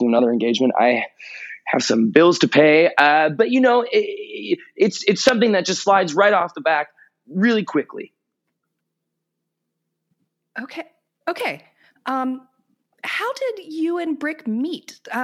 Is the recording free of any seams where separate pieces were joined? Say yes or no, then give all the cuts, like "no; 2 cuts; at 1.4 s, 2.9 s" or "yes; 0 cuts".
yes; 0 cuts